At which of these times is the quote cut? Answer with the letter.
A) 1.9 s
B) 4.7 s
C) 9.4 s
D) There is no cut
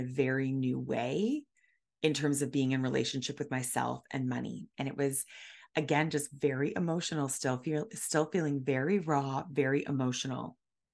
B